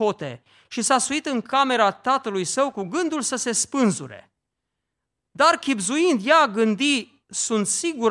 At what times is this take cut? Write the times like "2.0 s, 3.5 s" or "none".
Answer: 7.2 s